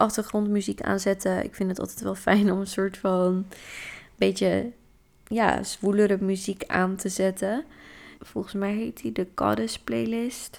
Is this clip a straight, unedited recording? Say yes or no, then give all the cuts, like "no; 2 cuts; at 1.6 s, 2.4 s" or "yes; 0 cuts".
no; 1 cut; at 8.2 s